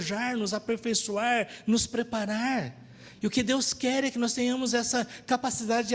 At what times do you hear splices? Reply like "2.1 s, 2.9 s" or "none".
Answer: none